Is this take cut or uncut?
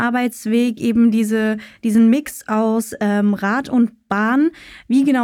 uncut